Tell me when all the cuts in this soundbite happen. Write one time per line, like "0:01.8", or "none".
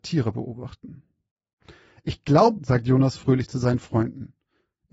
0:02.6